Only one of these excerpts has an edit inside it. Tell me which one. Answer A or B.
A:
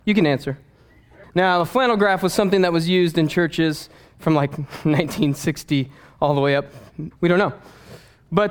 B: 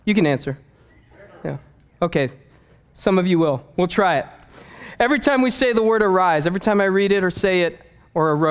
A